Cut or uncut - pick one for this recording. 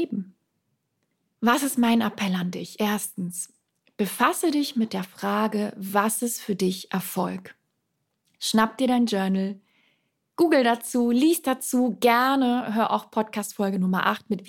uncut